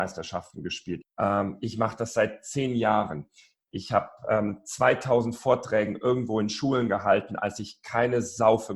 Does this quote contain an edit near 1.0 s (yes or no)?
yes